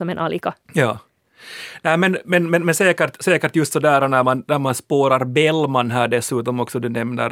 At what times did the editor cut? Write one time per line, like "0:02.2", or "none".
none